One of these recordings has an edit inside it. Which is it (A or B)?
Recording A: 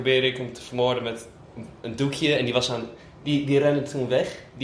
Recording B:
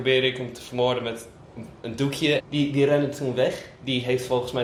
B